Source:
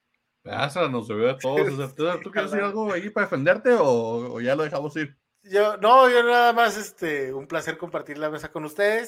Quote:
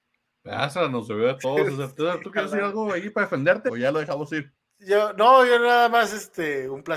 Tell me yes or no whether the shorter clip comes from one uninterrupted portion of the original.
no